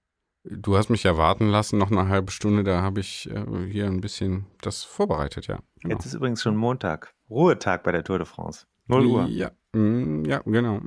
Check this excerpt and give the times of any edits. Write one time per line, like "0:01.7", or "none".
none